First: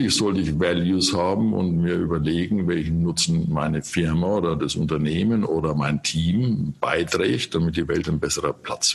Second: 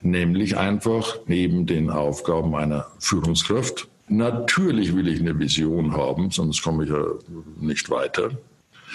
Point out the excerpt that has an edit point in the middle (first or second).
second